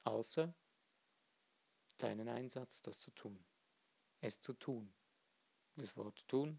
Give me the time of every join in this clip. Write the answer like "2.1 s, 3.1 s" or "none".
4.0 s